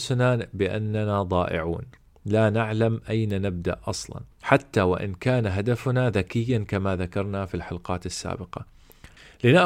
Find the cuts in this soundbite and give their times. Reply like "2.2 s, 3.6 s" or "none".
4.3 s

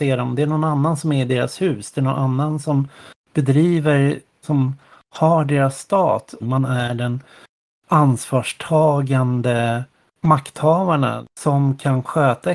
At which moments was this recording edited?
4.4 s, 6.4 s, 11.3 s

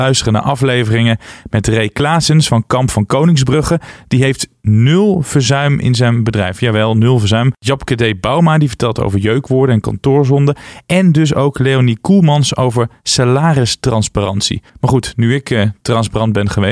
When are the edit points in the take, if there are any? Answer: 14.7 s

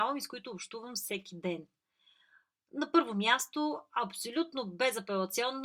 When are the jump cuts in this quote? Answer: none

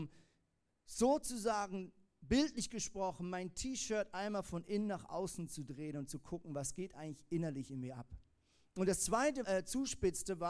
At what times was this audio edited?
9.4 s

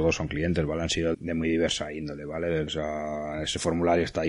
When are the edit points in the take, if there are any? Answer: 1.1 s, 2.7 s

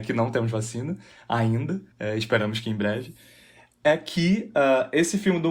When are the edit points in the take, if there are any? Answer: 1.9 s

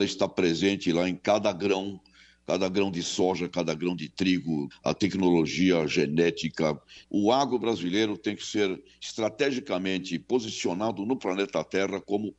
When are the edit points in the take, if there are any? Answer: 4.7 s, 7.0 s

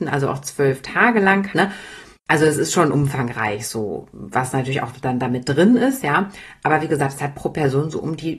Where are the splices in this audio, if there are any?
1.5 s

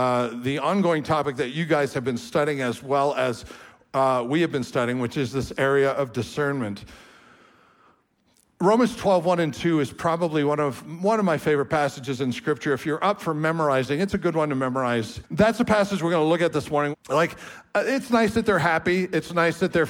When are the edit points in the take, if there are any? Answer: 15.2 s, 16.9 s

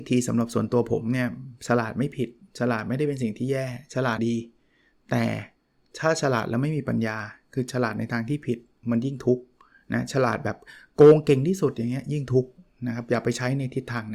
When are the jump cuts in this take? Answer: 4.2 s

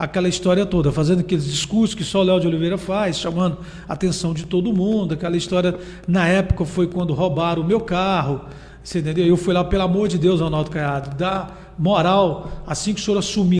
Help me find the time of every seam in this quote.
none

